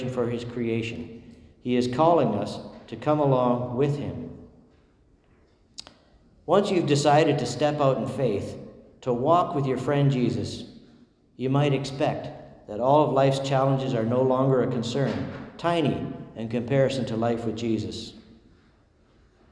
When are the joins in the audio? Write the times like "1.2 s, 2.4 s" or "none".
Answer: none